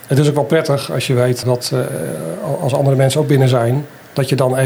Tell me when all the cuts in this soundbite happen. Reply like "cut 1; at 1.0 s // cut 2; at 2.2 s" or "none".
cut 1; at 1.4 s